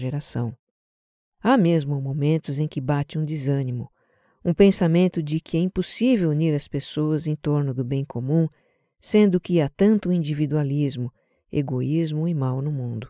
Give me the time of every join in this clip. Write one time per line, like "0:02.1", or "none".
none

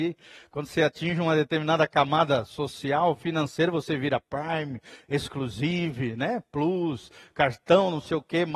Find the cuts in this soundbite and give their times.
none

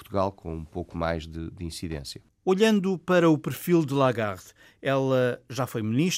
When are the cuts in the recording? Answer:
none

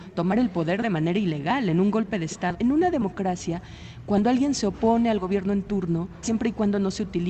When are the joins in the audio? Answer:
0:02.5
0:06.2

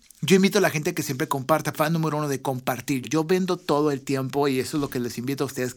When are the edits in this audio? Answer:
0:01.7
0:03.0

